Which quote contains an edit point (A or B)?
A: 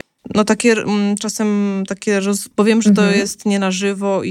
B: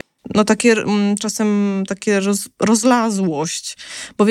A